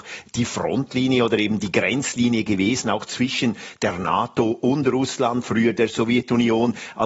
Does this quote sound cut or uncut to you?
uncut